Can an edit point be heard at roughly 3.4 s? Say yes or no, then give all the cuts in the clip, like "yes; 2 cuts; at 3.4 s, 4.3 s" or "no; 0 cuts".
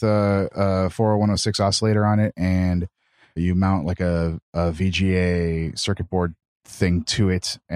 yes; 1 cut; at 3.4 s